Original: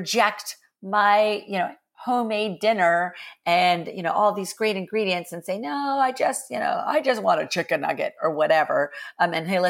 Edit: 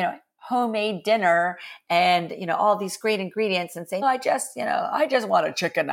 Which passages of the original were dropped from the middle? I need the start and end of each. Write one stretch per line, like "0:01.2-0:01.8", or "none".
0:05.6-0:06.0